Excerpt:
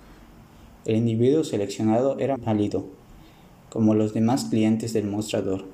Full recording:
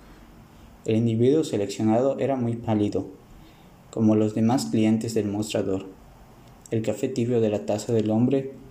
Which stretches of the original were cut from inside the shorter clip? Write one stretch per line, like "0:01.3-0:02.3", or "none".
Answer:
0:02.4-0:02.6

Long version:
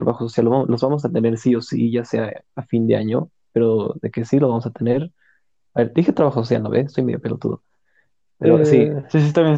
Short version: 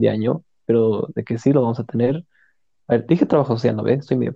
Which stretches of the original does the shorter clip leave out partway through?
none

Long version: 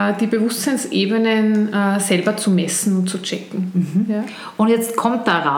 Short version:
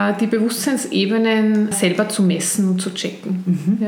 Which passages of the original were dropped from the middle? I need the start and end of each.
0:01.7-0:02.0

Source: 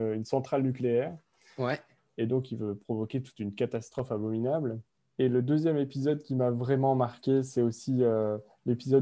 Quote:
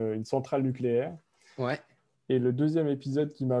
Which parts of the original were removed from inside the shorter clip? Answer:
0:02.1-0:05.0

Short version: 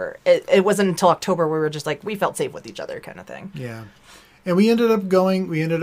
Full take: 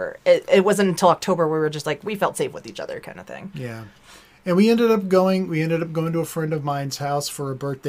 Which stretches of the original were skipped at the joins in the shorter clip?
none

